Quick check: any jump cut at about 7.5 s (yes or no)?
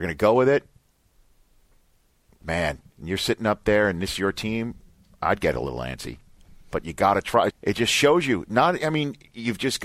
yes